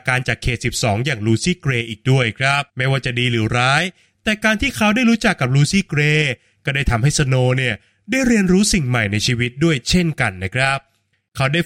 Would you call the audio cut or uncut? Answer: cut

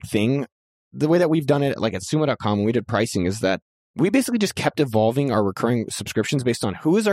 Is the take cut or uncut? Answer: uncut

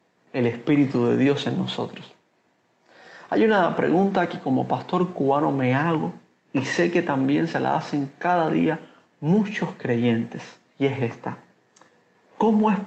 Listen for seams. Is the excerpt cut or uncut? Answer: uncut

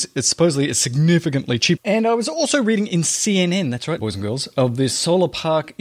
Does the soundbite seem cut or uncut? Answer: cut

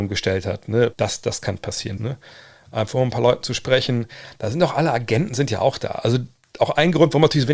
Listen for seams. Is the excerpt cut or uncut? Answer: cut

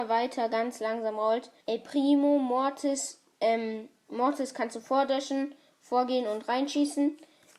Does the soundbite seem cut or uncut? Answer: cut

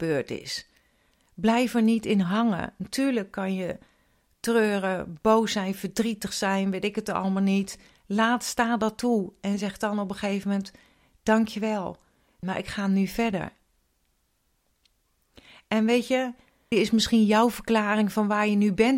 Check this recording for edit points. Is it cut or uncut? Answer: cut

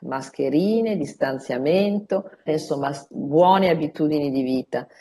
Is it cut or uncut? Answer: cut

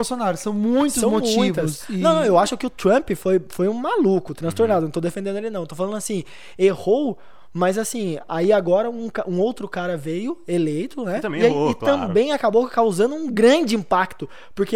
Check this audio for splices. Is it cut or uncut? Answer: uncut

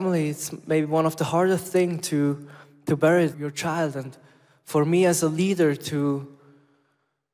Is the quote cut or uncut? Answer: cut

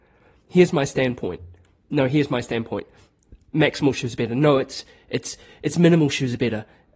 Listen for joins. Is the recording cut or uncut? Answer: uncut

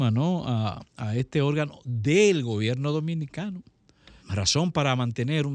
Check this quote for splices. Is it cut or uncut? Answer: cut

